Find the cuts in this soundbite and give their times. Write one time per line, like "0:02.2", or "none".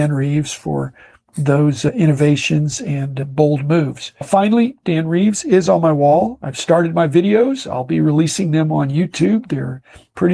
none